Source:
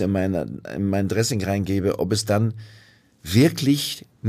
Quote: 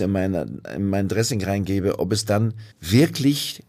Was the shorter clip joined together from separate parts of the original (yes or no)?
yes